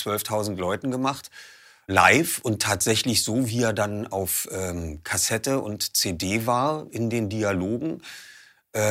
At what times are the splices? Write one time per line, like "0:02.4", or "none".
none